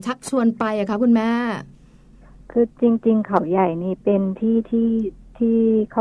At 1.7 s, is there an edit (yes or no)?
no